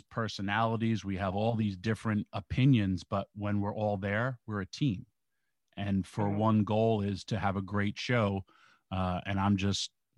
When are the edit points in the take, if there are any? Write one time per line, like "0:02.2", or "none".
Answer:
none